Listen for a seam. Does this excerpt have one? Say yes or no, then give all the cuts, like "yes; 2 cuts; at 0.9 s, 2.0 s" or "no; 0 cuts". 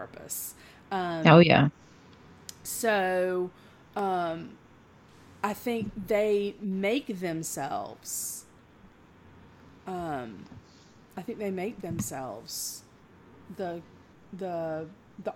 no; 0 cuts